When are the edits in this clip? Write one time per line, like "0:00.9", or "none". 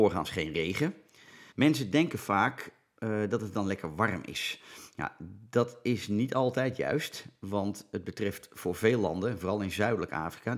0:01.5